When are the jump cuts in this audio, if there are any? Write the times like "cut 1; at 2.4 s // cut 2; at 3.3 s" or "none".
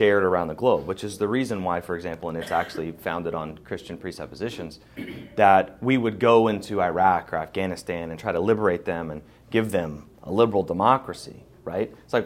none